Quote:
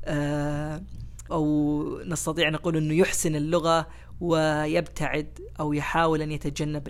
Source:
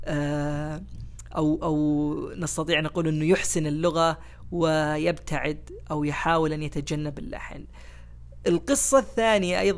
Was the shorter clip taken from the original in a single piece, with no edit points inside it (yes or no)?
no